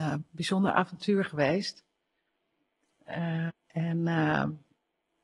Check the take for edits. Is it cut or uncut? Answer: cut